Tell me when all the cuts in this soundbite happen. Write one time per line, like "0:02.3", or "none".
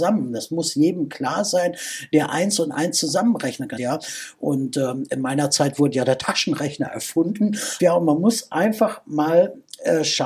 0:03.8
0:07.8